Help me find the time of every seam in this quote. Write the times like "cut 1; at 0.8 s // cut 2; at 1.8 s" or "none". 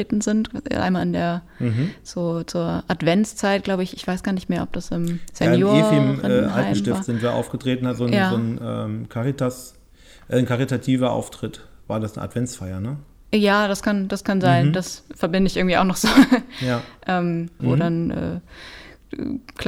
cut 1; at 17.6 s

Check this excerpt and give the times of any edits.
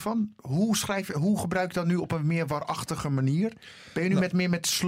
none

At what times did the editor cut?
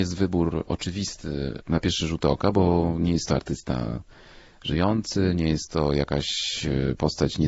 none

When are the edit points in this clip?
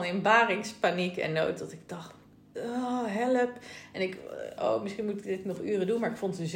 cut 1; at 4.6 s

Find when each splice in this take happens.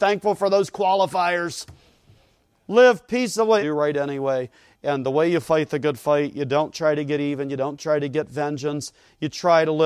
cut 1; at 3.6 s

